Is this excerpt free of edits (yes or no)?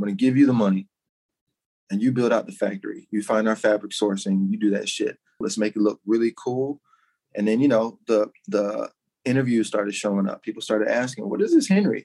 no